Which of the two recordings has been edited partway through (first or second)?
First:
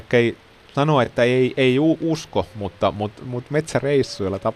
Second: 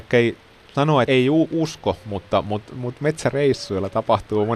second